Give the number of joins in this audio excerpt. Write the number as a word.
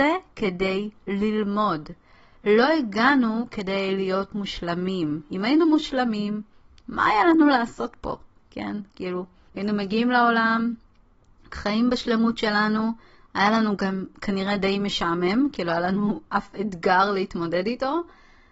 one